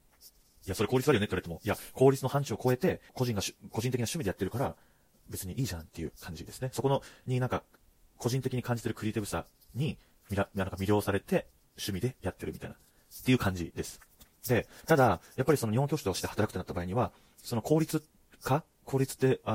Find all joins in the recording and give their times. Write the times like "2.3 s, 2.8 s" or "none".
3.1 s

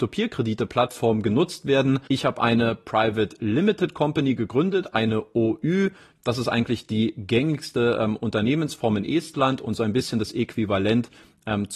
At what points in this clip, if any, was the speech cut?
2.1 s

